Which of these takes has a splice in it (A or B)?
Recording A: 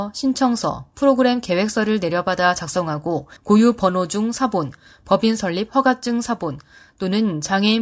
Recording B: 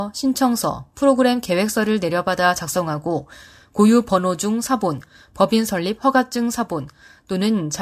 A